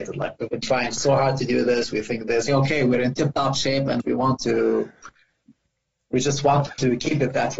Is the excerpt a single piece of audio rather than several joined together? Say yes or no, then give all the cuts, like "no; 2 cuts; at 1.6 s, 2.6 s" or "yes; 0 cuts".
no; 1 cut; at 2.5 s